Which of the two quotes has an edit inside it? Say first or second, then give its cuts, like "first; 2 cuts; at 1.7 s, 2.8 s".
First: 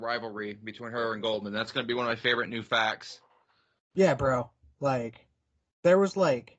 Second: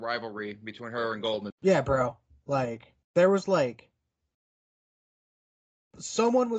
second; 2 cuts; at 1.5 s, 3.0 s